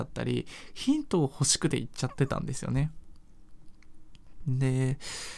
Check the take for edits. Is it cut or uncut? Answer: uncut